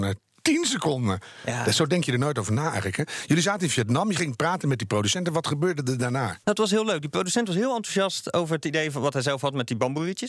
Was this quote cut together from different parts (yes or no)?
yes